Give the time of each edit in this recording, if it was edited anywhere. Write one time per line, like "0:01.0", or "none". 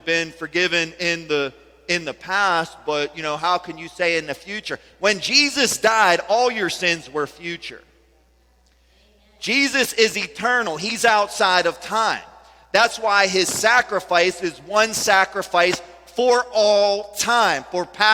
none